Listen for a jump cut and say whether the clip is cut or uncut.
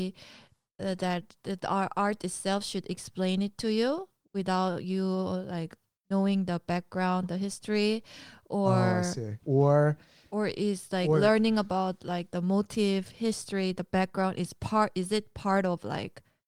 cut